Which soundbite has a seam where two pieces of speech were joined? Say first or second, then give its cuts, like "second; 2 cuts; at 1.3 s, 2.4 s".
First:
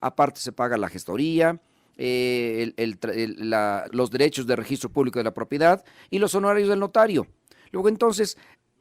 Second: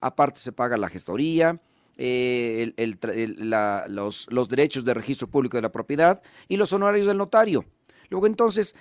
first; 1 cut; at 3.9 s